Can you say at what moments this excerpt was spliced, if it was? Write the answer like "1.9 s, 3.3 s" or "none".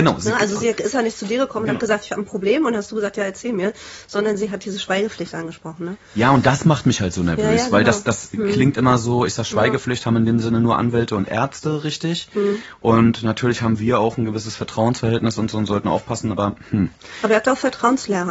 none